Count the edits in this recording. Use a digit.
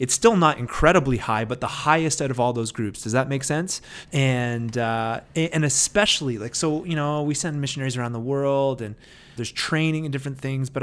2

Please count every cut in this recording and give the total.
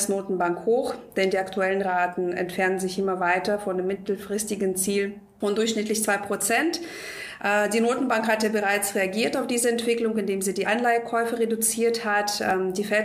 0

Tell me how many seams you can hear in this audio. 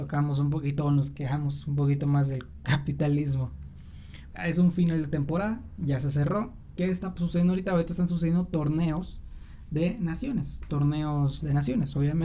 1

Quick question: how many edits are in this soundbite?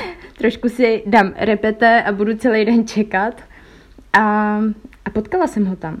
0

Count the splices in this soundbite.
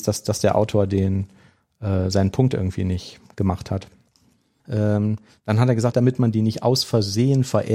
2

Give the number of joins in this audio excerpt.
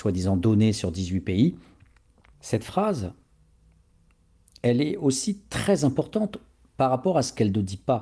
1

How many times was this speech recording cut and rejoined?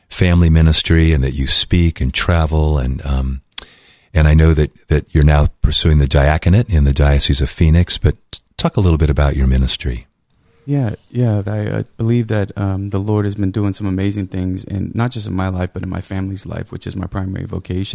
1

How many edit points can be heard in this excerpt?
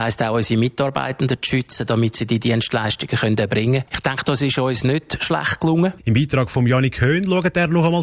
2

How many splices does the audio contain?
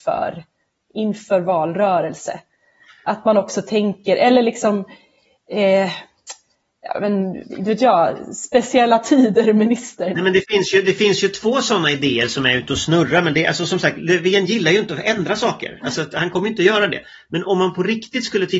1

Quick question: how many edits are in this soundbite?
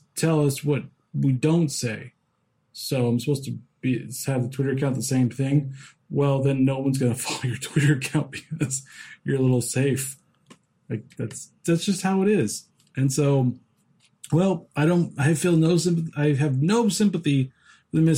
1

